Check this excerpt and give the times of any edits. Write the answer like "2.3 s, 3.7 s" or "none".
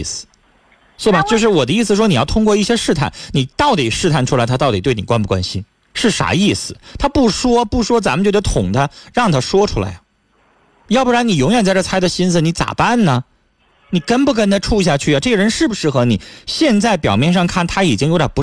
none